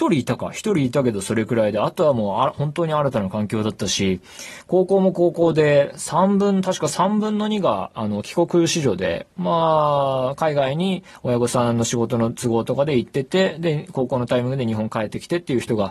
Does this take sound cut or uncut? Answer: uncut